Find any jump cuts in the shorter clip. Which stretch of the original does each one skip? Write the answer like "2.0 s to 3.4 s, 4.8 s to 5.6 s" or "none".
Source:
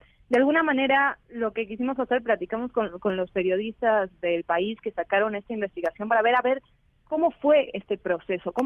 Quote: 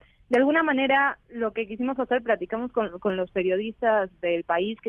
none

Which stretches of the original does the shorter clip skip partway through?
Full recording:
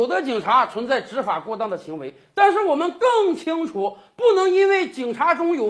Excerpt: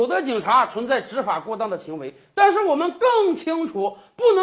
none

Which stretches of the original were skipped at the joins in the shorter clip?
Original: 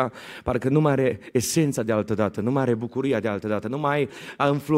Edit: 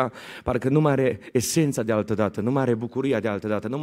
none

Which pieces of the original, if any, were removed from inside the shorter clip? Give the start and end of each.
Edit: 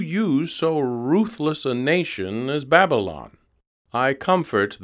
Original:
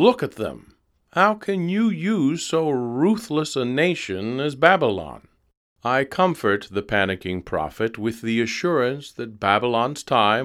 none

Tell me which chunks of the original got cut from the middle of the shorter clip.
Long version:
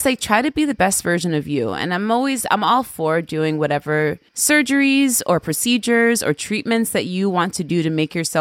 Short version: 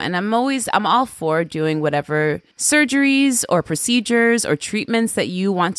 none

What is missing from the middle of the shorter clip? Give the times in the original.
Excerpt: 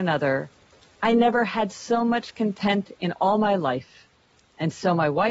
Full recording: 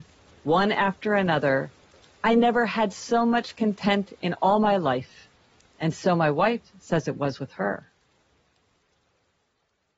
none

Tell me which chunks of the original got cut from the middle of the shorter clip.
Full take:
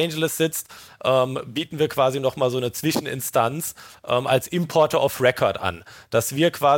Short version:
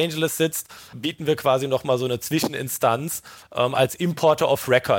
0.9 s to 1.5 s

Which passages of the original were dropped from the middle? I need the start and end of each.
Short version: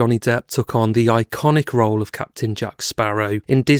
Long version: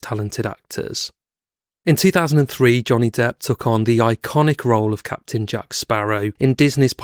none

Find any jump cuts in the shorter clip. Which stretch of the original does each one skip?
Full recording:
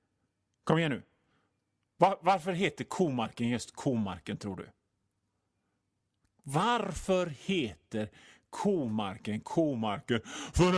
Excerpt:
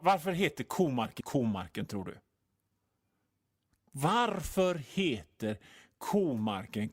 3.4 s to 3.7 s

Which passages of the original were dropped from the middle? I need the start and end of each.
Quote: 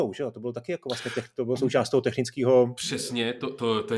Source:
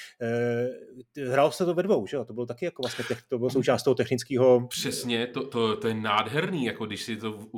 none

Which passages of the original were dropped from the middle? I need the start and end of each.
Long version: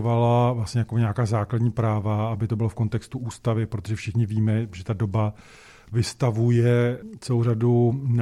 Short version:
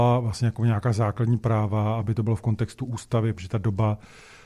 3.7 s to 4.7 s

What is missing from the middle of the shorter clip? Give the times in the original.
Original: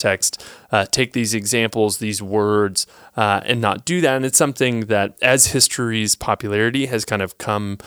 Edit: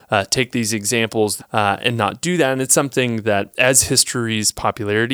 2.0 s to 3.0 s

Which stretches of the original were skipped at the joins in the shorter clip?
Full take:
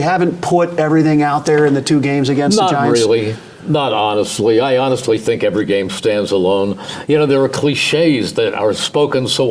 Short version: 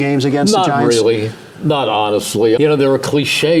4.6 s to 7.1 s

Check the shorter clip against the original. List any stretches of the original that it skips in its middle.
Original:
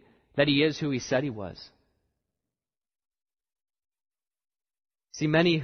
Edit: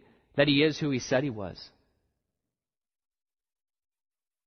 none

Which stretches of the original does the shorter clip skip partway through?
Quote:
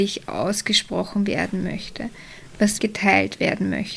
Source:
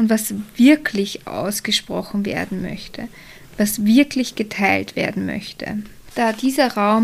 3.8 s to 4.3 s

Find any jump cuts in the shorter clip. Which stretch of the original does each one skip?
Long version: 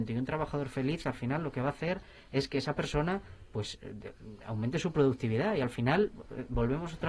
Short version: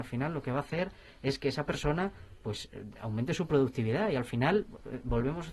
4.0 s to 4.4 s

